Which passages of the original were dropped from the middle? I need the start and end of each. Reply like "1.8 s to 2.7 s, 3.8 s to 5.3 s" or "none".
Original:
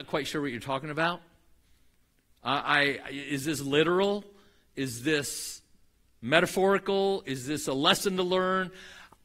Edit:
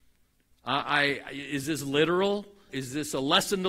4.5 s to 7.2 s